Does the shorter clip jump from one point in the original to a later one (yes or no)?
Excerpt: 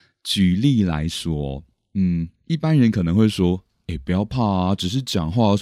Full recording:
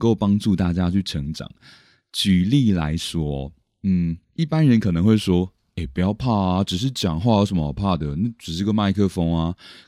no